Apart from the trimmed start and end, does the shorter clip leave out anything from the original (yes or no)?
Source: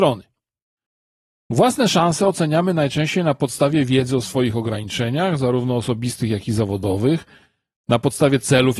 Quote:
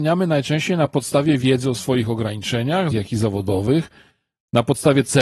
yes